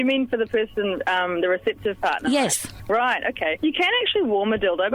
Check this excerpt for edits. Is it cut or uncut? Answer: uncut